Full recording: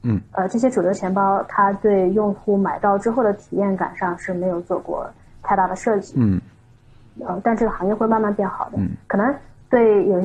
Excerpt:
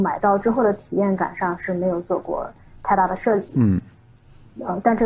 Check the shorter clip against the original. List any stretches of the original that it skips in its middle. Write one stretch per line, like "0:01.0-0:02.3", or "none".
none